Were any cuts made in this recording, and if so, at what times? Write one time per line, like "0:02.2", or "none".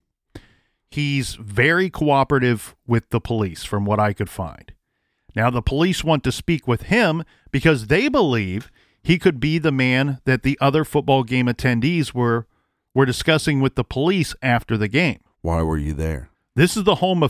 0:05.2
0:15.3
0:16.3